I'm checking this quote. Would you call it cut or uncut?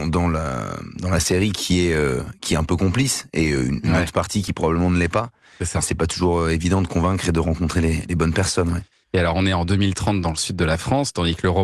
uncut